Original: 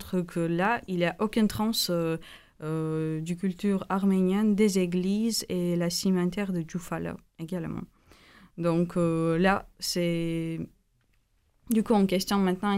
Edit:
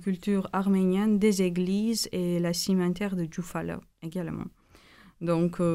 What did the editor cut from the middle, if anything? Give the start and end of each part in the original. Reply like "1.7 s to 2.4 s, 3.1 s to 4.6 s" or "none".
none